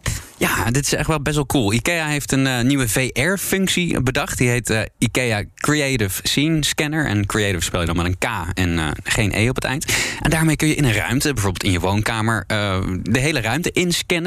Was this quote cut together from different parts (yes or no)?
no